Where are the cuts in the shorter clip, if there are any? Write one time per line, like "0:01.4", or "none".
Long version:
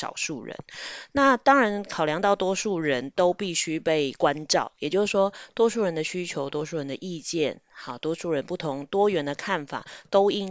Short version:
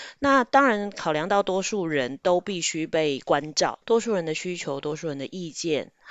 0:03.8